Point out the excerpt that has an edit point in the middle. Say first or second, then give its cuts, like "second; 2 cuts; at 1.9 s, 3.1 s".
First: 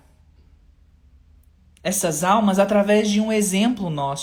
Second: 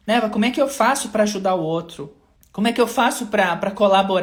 second; 1 cut; at 2.4 s